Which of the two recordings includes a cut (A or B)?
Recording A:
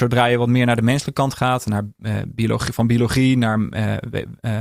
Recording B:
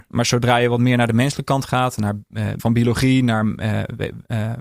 B